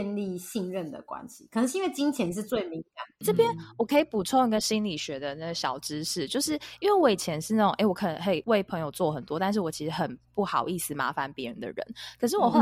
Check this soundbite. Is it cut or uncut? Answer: uncut